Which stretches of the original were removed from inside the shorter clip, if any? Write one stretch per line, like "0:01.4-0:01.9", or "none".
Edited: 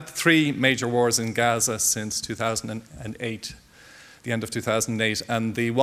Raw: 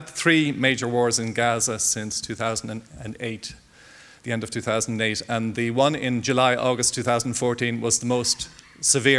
none